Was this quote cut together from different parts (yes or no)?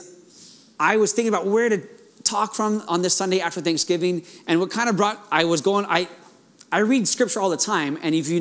no